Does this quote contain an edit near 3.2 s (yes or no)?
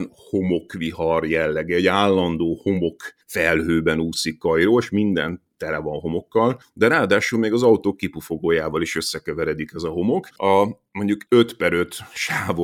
yes